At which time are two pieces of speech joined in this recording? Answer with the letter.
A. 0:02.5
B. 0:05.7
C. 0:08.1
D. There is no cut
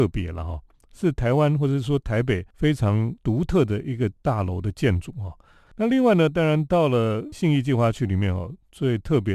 B